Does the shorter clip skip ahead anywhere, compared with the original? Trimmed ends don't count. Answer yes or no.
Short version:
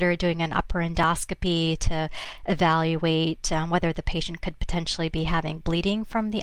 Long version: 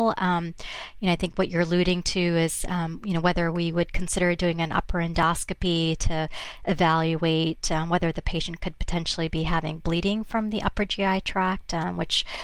no